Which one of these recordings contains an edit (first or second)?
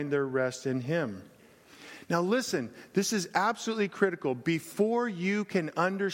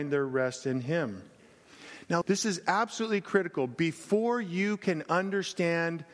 second